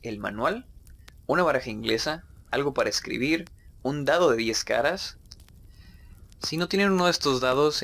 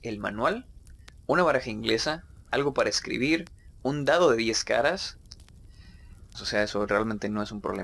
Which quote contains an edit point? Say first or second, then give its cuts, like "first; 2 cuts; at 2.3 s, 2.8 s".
second; 1 cut; at 6.3 s